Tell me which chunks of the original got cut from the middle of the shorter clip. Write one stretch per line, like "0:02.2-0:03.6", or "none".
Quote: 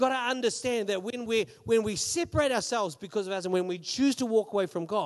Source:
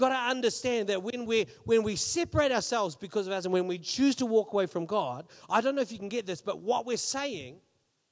none